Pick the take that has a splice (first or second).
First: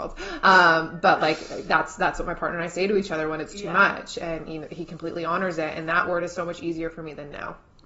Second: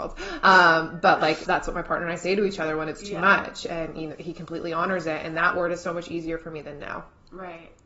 second